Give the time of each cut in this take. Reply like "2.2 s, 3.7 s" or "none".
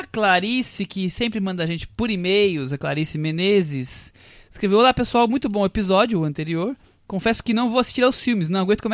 none